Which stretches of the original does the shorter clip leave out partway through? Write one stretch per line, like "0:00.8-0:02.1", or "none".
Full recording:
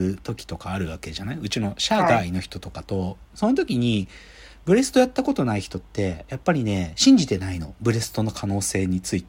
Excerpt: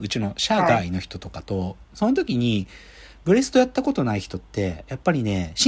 none